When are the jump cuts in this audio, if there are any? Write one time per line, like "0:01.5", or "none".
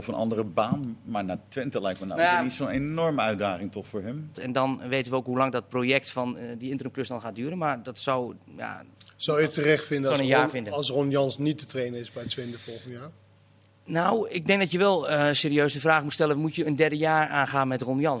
0:04.3